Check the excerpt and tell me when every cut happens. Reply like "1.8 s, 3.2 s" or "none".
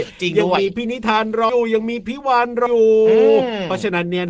1.5 s, 2.7 s

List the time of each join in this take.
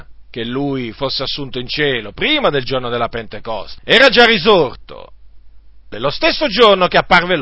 3.8 s, 5.9 s

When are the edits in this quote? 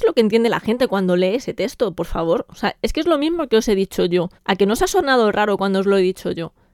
4.4 s

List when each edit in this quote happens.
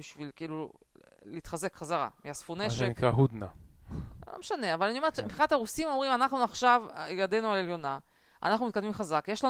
none

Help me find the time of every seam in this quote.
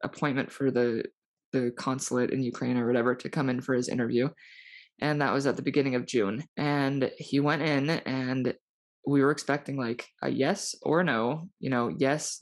6.5 s

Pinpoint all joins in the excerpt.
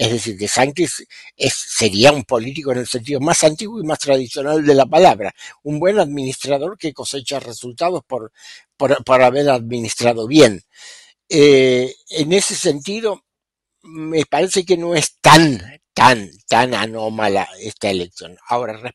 none

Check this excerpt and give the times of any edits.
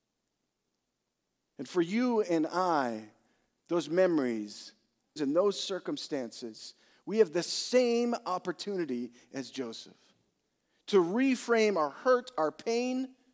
3.6 s, 5.2 s

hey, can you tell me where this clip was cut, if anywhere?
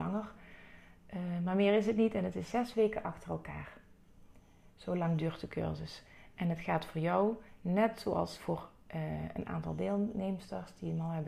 none

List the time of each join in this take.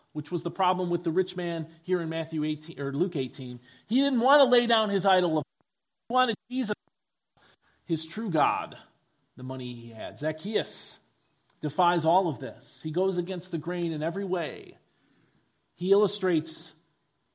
none

